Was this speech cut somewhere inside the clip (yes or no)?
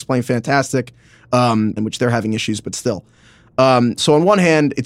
yes